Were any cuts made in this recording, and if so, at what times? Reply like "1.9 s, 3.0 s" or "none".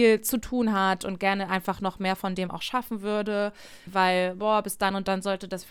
3.9 s